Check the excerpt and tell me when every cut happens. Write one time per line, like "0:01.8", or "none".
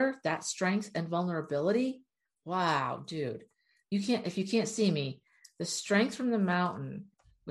none